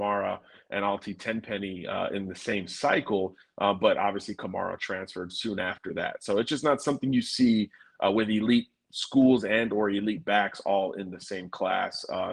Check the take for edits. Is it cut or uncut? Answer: uncut